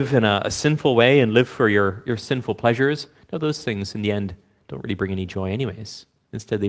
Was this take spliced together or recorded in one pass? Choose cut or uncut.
uncut